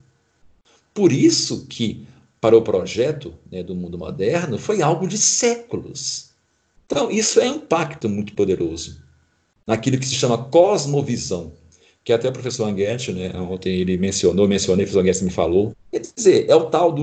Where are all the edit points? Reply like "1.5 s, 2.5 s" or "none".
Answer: 6.8 s, 15.7 s